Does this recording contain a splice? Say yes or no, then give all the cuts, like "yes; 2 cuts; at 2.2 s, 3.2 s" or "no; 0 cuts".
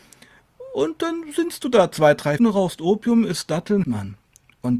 yes; 2 cuts; at 2.4 s, 3.8 s